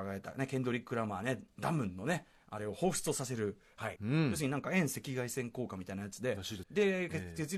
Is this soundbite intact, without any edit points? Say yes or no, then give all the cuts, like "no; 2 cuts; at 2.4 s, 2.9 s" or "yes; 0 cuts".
no; 2 cuts; at 4.0 s, 6.6 s